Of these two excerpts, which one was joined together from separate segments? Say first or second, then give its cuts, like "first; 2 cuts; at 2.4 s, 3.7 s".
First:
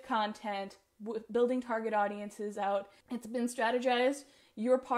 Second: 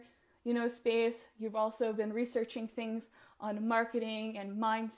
first; 1 cut; at 3.0 s